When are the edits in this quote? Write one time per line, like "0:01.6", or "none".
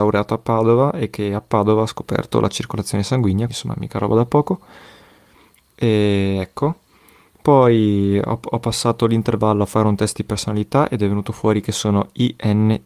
0:03.5